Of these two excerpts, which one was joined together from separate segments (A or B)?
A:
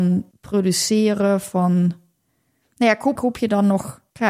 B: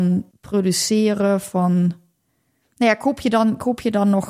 A